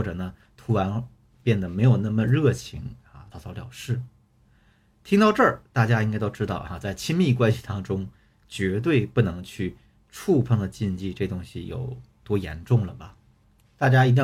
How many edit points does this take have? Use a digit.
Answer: 1